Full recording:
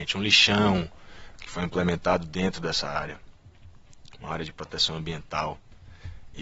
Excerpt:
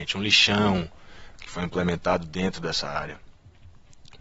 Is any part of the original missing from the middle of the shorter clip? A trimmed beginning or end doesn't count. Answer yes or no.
no